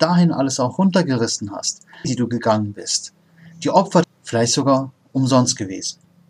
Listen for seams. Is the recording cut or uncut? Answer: cut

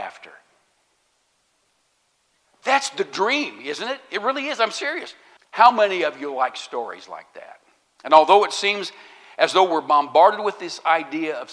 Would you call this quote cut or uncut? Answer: cut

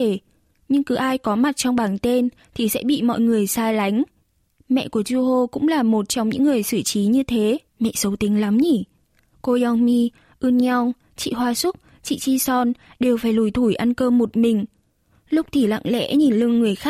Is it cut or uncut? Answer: cut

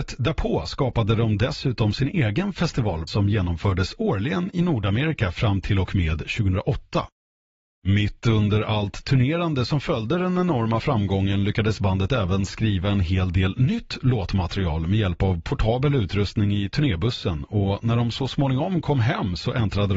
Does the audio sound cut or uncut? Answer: cut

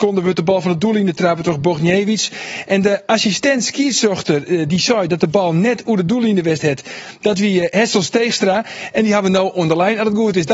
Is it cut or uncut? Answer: uncut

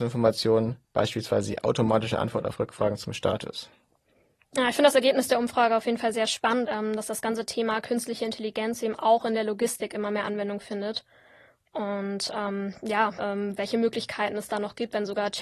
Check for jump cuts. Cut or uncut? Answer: cut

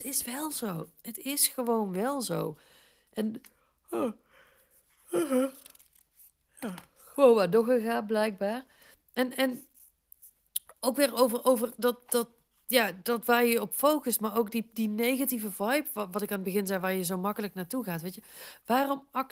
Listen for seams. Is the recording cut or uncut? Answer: uncut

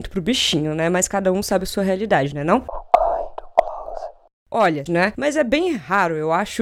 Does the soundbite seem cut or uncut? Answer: cut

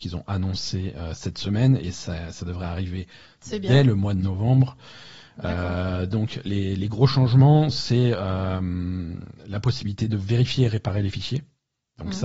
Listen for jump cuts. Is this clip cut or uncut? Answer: uncut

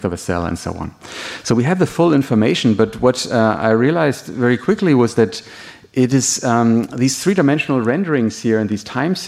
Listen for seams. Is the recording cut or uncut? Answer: uncut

